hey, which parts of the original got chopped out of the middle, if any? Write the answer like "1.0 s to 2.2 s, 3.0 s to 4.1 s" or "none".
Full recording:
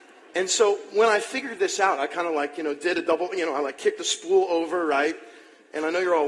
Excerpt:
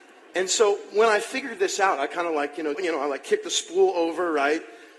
2.7 s to 3.3 s